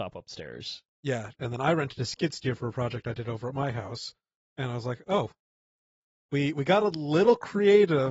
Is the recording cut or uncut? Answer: uncut